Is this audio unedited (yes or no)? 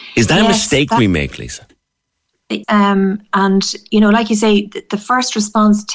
no